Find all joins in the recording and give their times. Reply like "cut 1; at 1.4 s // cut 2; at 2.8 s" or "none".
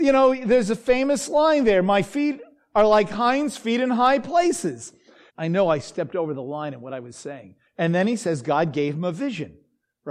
cut 1; at 5.3 s // cut 2; at 7.7 s